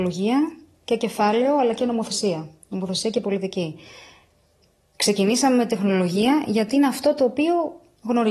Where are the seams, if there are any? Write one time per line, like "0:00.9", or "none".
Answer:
none